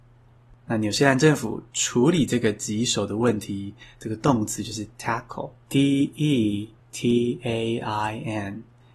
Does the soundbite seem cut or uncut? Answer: cut